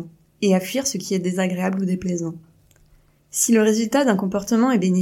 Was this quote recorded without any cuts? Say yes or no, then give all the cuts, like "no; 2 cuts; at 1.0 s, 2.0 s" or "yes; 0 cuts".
no; 1 cut; at 3.2 s